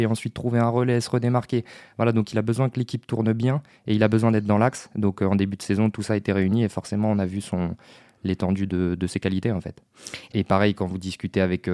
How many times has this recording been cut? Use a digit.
1